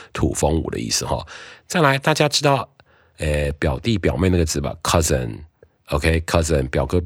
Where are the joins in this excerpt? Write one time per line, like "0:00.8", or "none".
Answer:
none

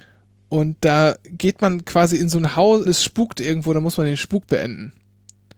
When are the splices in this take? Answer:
0:02.9

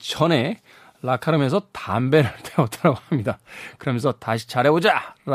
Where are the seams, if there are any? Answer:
none

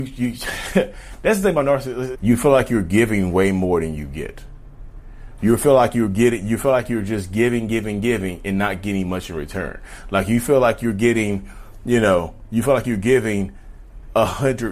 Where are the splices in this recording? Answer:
0:02.1

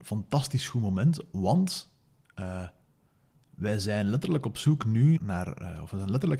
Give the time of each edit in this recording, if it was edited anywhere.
0:05.2

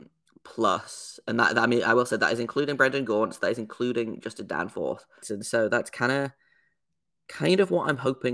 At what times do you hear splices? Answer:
0:05.2

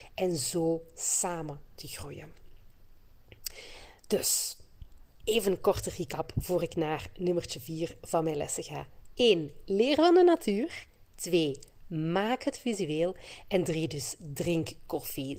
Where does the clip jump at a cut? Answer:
none

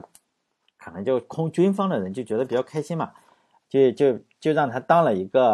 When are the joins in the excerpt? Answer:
none

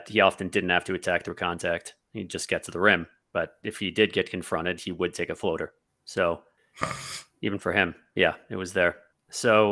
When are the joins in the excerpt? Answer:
none

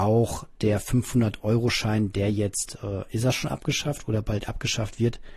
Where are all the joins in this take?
none

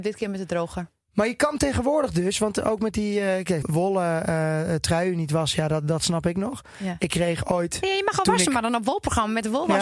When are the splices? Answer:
0:03.6

